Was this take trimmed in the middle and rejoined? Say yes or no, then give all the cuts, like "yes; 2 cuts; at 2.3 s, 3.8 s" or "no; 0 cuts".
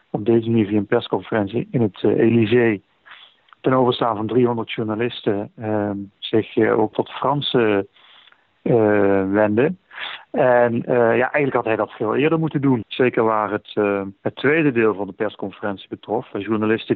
yes; 3 cuts; at 6.9 s, 12.8 s, 14.2 s